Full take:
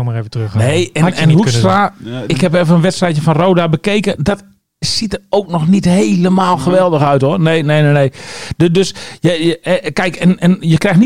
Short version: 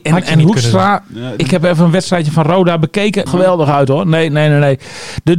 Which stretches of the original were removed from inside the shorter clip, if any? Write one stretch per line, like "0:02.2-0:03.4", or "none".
0:04.2-0:06.6